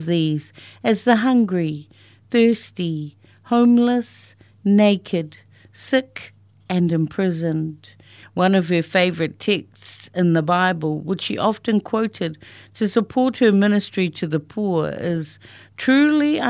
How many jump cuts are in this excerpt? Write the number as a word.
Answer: one